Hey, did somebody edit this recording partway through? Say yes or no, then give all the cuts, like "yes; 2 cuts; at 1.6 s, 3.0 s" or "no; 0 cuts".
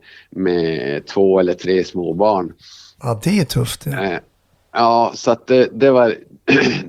no; 0 cuts